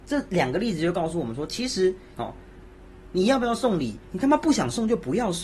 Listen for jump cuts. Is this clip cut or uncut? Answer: cut